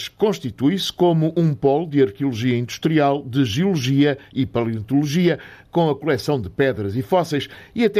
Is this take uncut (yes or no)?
yes